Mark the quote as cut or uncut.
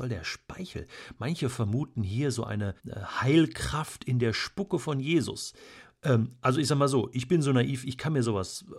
cut